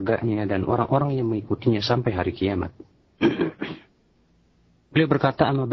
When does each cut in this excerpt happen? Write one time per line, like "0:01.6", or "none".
none